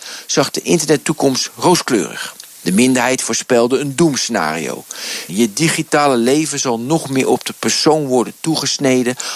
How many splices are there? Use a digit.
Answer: 1